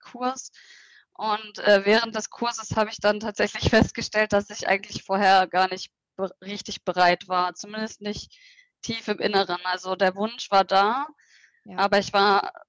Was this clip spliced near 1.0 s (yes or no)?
no